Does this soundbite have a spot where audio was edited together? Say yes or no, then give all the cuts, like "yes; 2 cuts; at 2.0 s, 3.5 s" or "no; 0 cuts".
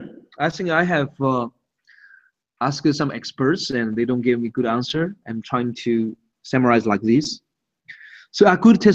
no; 0 cuts